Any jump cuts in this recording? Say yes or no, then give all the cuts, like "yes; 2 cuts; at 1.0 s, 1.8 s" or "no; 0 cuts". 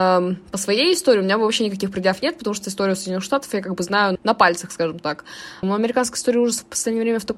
yes; 2 cuts; at 4.2 s, 5.6 s